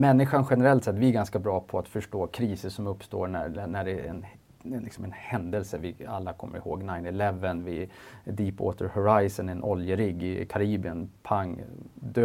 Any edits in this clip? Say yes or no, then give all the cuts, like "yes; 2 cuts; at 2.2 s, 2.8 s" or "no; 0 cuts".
no; 0 cuts